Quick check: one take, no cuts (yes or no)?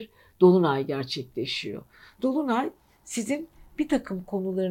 yes